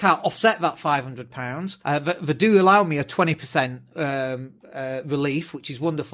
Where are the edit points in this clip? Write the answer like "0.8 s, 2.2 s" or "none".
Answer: 1.8 s